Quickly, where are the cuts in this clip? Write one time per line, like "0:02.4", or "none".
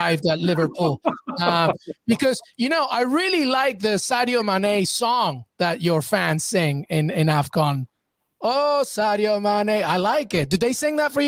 none